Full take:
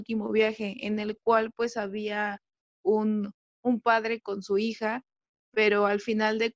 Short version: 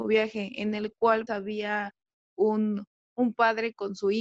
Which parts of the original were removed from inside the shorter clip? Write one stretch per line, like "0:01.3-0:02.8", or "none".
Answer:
0:01.5-0:01.7